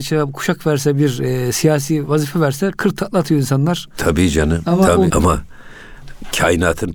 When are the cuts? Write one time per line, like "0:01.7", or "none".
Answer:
0:05.1